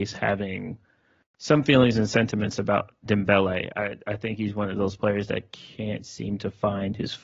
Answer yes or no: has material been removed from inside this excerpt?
no